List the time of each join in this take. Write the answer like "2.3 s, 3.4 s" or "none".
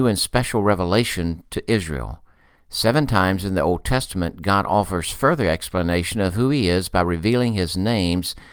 2.6 s

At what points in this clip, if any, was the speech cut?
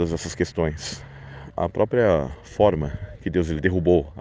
1.5 s

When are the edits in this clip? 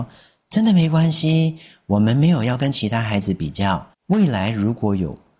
3.9 s

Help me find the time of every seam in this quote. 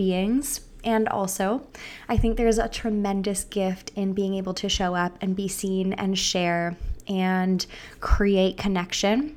none

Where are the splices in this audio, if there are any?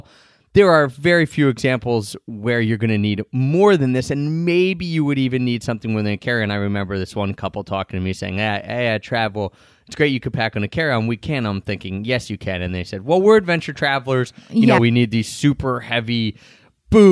14.8 s

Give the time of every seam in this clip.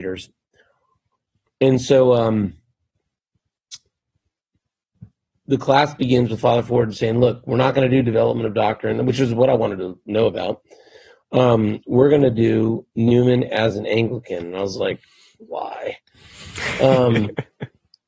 none

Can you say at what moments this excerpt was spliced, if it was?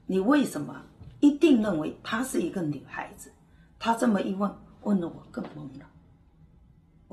none

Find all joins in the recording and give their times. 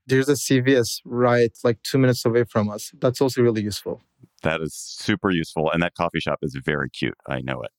none

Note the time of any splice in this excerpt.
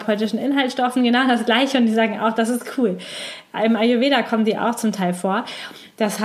none

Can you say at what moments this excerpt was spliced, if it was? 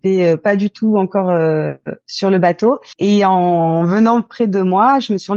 none

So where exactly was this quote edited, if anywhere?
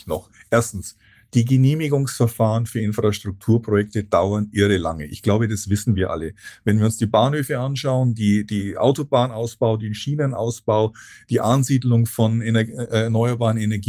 none

